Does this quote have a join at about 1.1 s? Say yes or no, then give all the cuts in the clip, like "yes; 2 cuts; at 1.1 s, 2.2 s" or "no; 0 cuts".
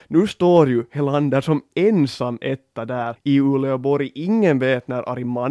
no; 1 cut; at 3.2 s